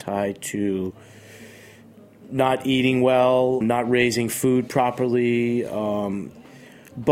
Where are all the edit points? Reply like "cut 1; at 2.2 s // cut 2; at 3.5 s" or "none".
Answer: cut 1; at 3.6 s